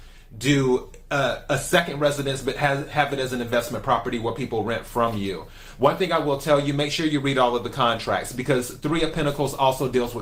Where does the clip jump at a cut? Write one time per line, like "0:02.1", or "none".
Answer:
none